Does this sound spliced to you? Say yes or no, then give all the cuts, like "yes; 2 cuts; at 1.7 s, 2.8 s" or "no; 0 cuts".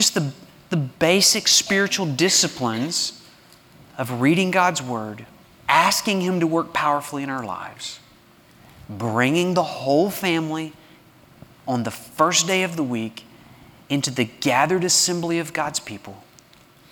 yes; 1 cut; at 5.6 s